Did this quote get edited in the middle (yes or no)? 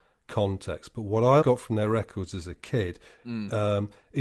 yes